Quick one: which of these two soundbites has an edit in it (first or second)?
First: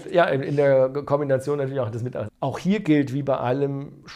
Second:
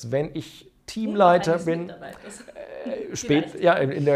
first